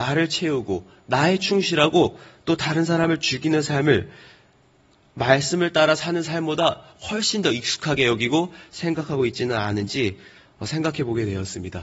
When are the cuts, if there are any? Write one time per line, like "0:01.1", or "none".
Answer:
none